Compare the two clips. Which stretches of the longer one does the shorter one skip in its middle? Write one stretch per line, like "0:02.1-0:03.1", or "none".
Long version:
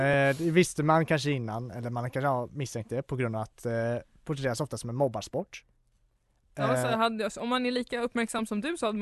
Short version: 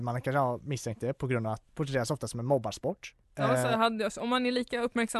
0:03.6-0:04.2
0:05.7-0:06.4